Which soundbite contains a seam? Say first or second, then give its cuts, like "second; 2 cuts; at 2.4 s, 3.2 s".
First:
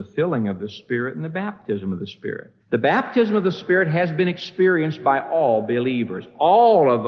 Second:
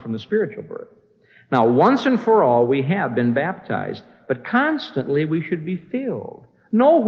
first; 1 cut; at 2.6 s